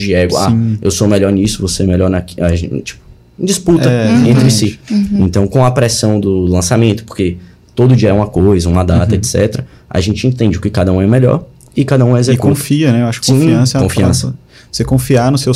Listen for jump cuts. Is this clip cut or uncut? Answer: uncut